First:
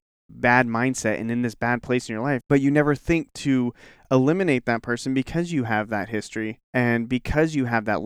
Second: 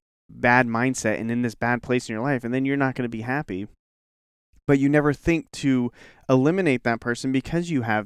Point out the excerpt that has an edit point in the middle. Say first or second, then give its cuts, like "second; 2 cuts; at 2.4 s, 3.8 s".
first; 2 cuts; at 2.4 s, 6.6 s